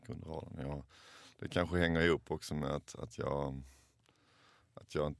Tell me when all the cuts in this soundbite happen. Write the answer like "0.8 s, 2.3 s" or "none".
none